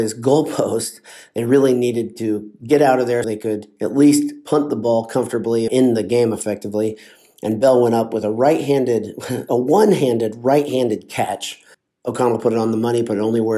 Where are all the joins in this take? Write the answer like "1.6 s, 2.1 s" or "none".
3.2 s, 5.7 s